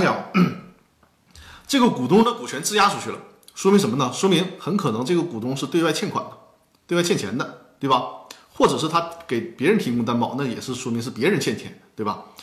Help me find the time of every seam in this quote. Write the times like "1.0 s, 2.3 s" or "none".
none